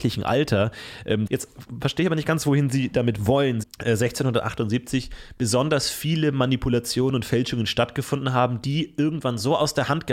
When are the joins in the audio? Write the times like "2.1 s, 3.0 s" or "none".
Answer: 1.3 s, 3.6 s